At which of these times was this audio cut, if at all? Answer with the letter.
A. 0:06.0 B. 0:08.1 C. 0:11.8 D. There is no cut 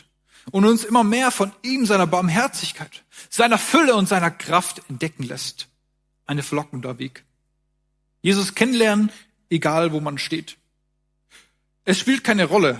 B